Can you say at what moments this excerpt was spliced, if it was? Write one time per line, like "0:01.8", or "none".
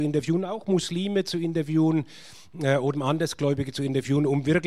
0:02.9